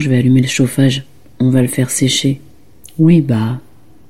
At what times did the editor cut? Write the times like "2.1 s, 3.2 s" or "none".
2.8 s